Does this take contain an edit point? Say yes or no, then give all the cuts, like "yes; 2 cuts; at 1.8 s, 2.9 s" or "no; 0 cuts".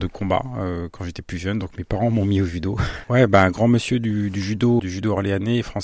yes; 2 cuts; at 3.0 s, 4.8 s